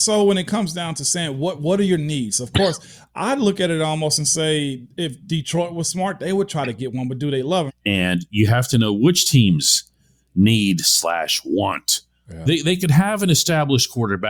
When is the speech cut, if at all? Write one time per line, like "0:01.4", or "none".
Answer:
0:07.7
0:12.5